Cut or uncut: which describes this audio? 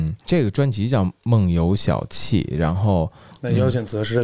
cut